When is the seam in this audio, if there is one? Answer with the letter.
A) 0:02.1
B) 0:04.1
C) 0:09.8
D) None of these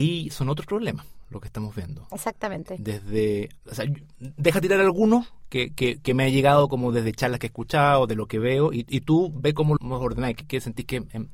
C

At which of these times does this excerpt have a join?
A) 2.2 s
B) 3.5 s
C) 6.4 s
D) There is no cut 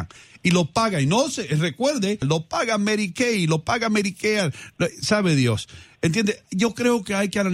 A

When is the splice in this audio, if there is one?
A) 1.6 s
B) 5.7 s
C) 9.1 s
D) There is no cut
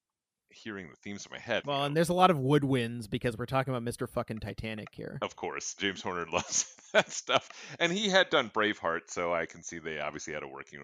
A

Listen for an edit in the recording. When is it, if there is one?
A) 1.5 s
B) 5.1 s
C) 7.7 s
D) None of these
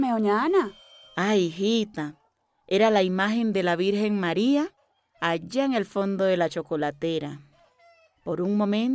D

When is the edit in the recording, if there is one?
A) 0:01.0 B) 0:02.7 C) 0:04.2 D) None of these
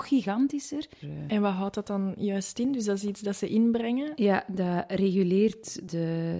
A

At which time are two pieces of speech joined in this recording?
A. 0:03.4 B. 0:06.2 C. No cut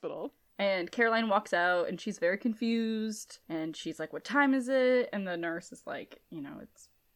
A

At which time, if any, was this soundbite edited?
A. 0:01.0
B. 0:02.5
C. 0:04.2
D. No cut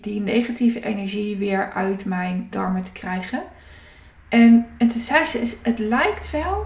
B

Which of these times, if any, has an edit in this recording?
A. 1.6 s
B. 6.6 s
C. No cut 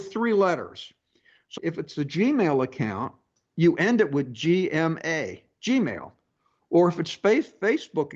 A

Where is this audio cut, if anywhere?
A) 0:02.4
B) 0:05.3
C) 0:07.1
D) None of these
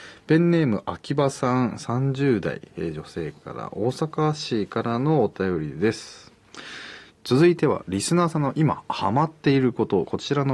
C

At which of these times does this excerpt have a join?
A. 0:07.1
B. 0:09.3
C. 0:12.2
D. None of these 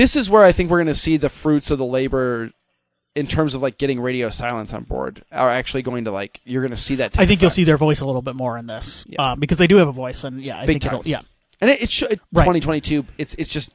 C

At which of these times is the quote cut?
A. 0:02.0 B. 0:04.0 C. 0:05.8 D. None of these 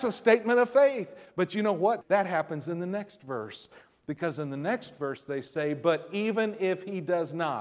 A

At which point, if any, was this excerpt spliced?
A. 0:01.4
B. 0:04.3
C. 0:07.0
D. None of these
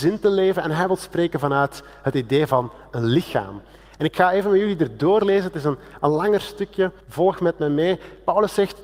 C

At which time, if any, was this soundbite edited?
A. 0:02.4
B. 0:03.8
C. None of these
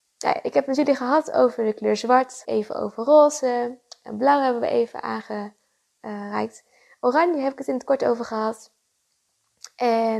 A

